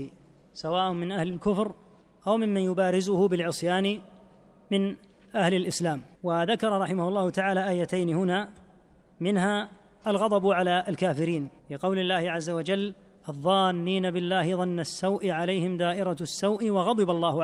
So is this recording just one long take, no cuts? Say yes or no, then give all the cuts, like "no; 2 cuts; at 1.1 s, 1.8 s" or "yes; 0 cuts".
no; 2 cuts; at 6.1 s, 11.6 s